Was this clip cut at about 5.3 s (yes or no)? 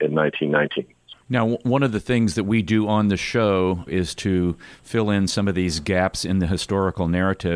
no